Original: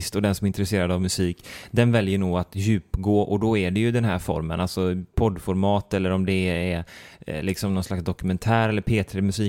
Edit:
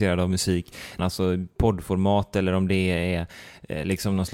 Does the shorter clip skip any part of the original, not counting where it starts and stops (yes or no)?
yes